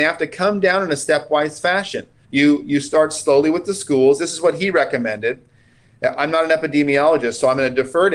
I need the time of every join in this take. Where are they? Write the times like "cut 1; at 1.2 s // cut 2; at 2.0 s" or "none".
cut 1; at 2.2 s